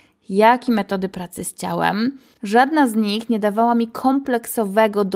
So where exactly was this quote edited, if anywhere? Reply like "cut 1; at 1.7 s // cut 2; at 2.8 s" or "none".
none